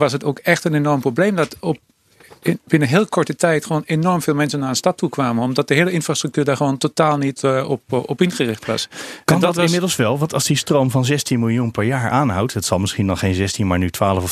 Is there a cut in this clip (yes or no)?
no